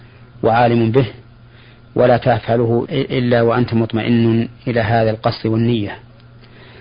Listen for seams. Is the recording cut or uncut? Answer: cut